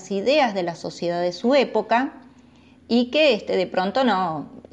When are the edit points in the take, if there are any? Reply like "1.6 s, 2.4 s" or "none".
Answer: none